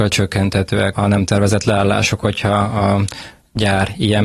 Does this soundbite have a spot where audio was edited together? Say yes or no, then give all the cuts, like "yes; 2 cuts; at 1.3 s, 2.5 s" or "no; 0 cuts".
yes; 1 cut; at 0.9 s